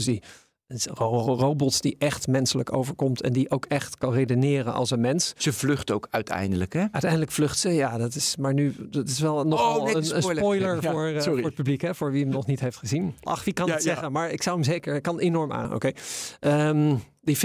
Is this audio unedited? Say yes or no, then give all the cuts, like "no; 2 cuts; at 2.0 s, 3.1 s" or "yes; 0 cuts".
no; 2 cuts; at 13.3 s, 15.6 s